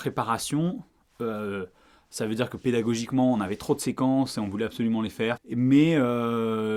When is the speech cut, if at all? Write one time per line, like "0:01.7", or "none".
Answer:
0:05.4